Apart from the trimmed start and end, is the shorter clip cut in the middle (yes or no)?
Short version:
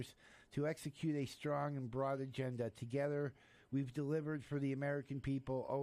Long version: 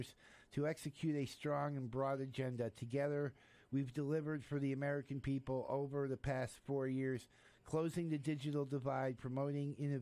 no